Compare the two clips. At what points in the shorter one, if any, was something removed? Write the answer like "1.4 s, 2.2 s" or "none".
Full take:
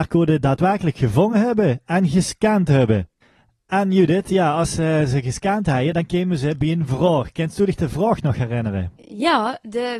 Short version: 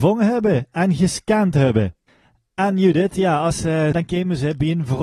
3.9 s